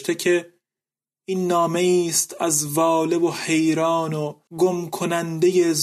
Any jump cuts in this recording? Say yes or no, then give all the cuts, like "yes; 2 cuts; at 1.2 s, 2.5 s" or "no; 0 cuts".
yes; 1 cut; at 4.5 s